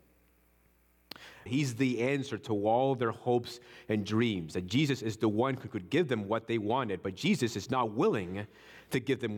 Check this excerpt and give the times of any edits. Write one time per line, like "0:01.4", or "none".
0:01.5